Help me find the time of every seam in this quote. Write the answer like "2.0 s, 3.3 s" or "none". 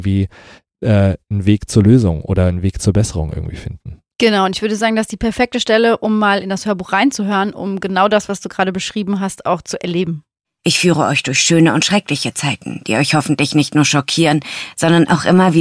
10.4 s